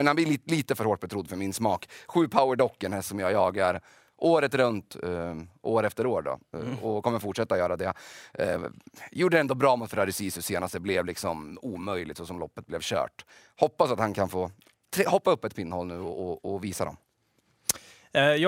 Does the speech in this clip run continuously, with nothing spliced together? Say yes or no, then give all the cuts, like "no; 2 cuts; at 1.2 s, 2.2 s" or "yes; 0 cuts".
yes; 0 cuts